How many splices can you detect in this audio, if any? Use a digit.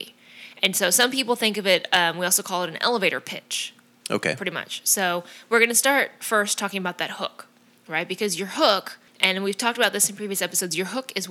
2